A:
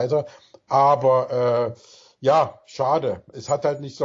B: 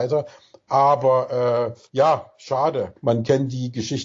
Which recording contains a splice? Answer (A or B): B